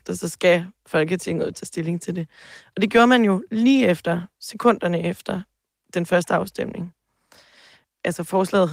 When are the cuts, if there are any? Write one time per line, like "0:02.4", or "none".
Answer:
none